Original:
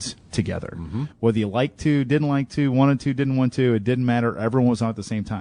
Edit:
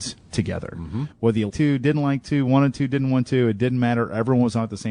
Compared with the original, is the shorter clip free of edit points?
no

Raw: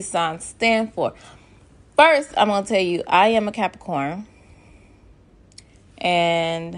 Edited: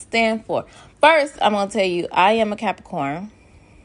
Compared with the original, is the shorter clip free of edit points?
no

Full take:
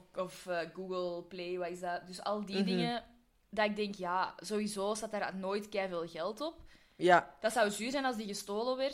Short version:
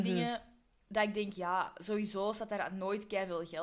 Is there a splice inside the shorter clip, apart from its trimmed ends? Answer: no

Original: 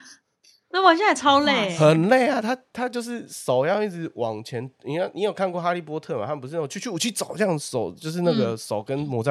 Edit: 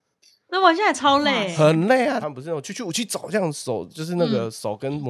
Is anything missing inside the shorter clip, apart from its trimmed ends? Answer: yes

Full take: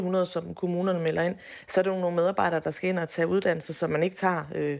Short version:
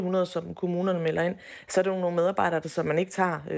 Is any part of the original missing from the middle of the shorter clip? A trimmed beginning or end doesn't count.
yes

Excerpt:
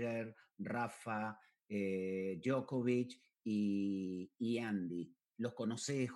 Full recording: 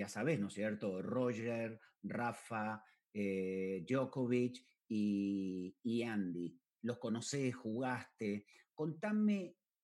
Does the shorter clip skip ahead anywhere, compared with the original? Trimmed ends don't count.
no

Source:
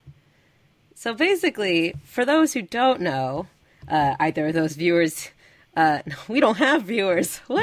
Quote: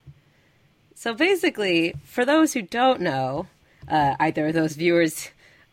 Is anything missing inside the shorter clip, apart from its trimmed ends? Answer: no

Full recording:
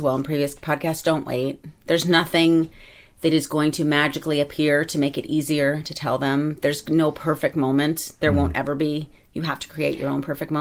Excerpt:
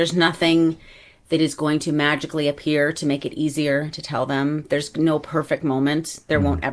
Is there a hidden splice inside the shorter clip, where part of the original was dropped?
no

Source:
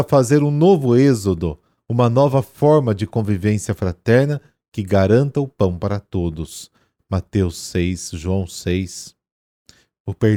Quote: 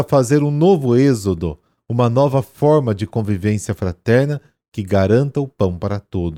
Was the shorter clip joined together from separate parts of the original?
no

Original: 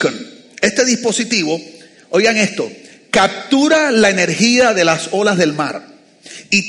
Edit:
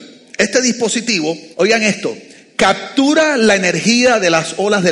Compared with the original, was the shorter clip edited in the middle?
yes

